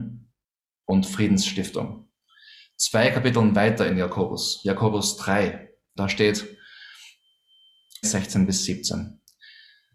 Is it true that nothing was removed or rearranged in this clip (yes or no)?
no